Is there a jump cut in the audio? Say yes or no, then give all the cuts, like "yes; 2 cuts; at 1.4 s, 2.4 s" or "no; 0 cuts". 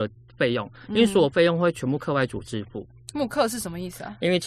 yes; 1 cut; at 3.1 s